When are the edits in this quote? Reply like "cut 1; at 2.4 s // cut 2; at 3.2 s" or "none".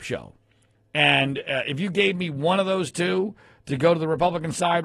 none

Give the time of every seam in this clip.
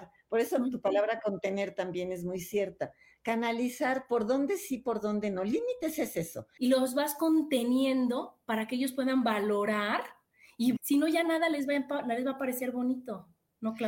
cut 1; at 6.6 s // cut 2; at 10.8 s

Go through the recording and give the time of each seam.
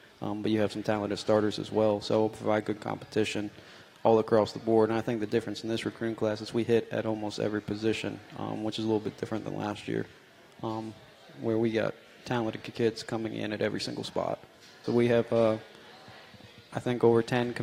cut 1; at 14.8 s

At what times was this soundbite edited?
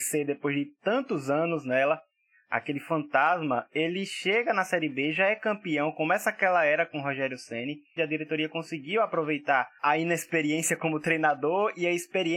cut 1; at 8.0 s

